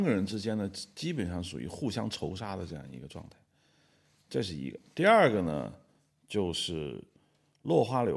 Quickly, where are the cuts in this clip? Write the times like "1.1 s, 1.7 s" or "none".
none